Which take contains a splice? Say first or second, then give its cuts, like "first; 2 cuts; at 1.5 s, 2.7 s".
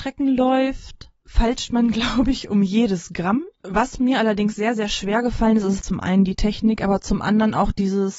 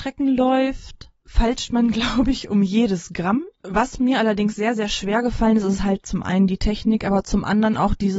first; 1 cut; at 5.8 s